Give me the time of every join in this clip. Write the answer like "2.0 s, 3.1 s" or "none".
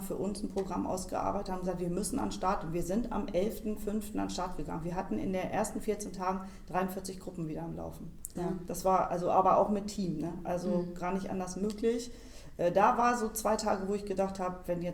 8.4 s